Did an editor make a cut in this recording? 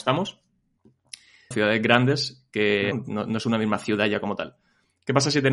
yes; 2 cuts; at 1.5 s, 2.9 s

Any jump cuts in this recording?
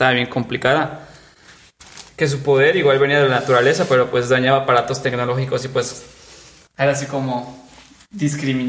yes; 1 cut; at 2.1 s

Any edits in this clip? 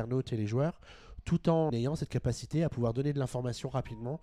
yes; 1 cut; at 1.7 s

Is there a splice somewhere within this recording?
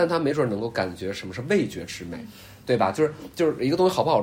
no; 0 cuts

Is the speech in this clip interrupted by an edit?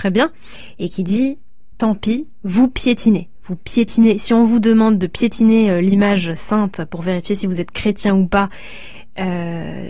no; 0 cuts

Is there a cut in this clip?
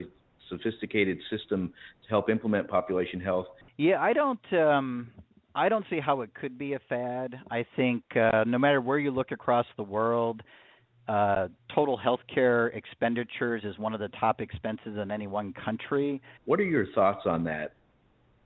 yes; 2 cuts; at 3.6 s, 16.4 s

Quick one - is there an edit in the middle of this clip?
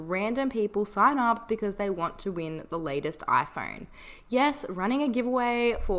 no; 0 cuts

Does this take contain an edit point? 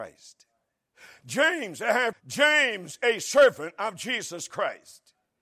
yes; 1 cut; at 2.1 s

